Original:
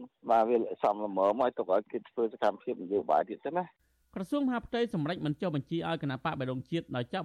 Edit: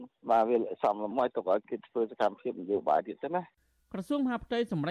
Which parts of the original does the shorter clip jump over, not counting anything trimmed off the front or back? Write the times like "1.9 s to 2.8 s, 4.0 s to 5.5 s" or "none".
1.1 s to 1.3 s